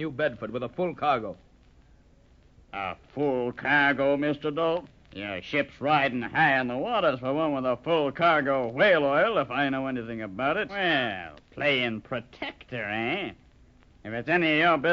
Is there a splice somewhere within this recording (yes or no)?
yes